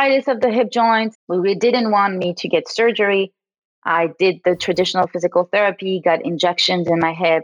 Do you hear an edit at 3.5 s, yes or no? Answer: no